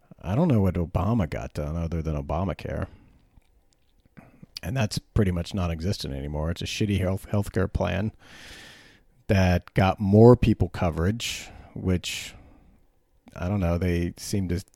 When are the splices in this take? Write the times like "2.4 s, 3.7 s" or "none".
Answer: 6.6 s